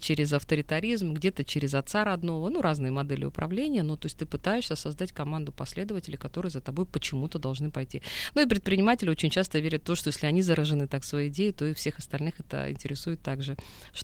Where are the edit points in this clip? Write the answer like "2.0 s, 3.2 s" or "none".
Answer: none